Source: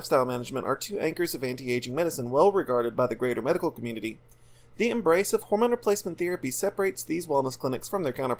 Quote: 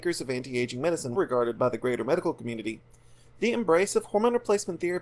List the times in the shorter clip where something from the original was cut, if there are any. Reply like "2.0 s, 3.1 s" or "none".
1.1 s